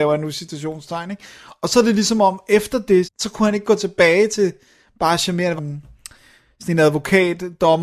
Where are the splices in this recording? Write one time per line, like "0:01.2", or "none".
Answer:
0:03.0
0:05.6